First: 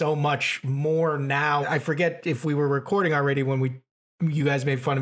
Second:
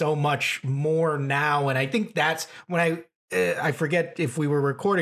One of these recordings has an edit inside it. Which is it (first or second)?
first